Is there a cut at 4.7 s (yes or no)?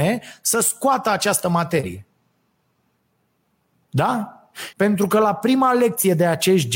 yes